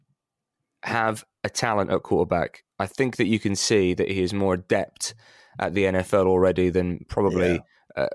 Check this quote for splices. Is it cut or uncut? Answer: uncut